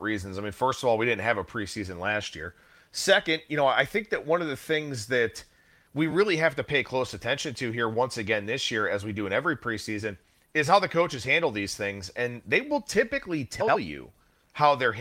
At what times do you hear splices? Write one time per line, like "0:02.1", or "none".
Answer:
none